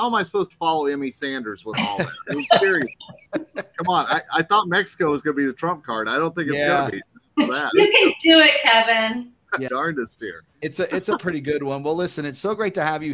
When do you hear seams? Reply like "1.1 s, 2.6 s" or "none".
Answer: 9.7 s

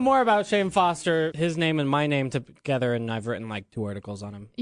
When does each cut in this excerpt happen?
1.3 s

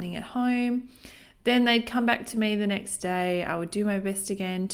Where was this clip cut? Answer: none

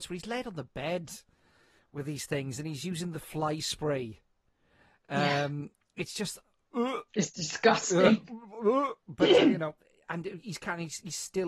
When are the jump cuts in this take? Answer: none

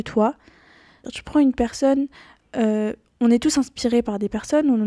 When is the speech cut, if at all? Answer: 1.0 s

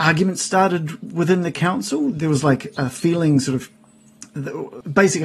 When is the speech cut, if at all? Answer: none

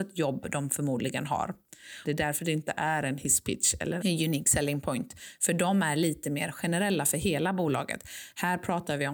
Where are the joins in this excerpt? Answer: 2.0 s, 4.0 s

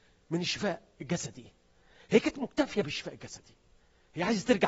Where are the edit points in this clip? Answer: none

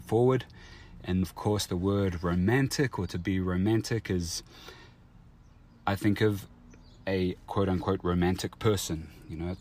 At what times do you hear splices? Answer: 1.2 s

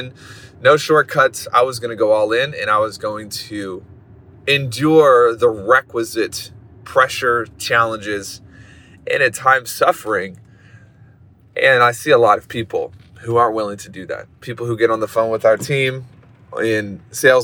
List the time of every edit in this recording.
none

